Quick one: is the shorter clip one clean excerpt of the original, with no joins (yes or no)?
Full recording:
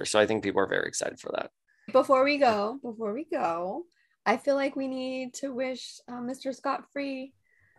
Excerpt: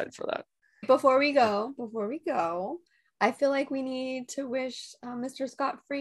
yes